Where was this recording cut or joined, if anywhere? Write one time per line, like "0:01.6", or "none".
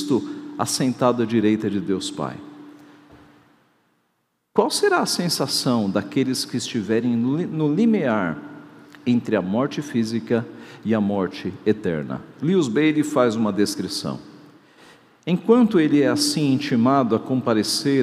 none